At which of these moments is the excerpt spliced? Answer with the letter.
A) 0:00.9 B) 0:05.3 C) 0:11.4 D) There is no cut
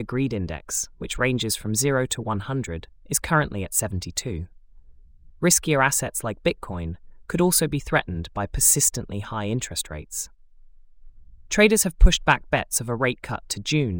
B